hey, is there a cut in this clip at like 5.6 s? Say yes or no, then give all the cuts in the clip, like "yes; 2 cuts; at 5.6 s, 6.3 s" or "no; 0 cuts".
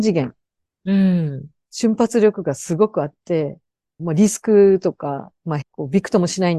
yes; 2 cuts; at 4.0 s, 5.6 s